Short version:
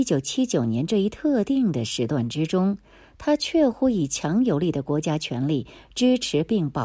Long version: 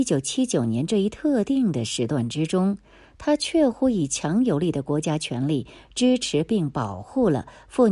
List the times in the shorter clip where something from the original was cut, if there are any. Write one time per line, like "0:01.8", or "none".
none